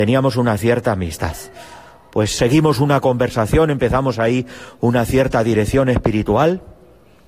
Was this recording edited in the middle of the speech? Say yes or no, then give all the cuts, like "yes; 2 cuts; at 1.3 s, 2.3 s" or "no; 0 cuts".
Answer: yes; 1 cut; at 2.4 s